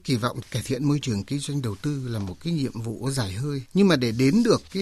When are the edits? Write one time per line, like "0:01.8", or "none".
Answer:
none